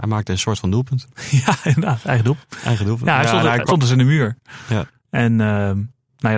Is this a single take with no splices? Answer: no; 1 cut; at 3.7 s

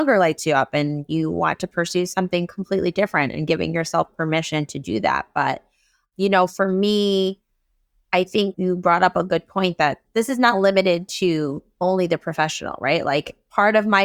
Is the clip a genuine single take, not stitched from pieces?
yes; 0 cuts

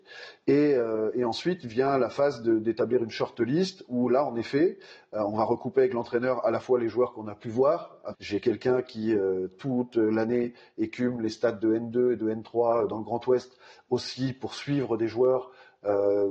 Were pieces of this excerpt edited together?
yes; 1 cut; at 8.1 s

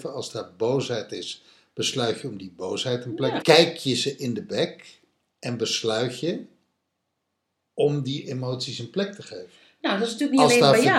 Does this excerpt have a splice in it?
yes; 1 cut; at 3.4 s

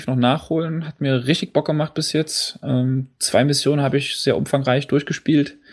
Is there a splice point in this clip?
no; 0 cuts

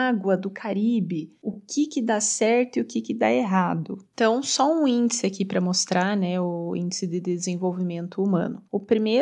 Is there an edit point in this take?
no; 0 cuts

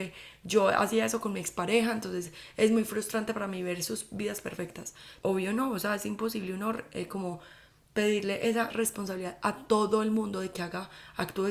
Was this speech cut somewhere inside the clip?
yes; 2 cuts; at 5.2 s, 8.7 s

